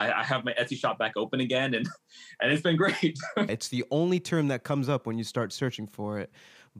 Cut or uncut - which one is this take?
cut